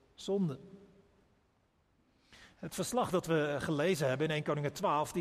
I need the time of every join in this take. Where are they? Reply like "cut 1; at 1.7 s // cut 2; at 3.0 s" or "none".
cut 1; at 2.5 s